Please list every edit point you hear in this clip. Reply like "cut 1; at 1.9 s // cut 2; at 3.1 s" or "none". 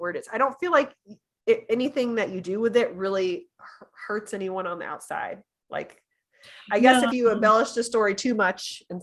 none